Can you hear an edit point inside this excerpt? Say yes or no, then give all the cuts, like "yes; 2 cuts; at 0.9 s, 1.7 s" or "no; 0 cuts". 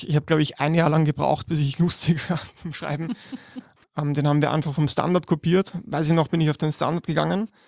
yes; 1 cut; at 3.8 s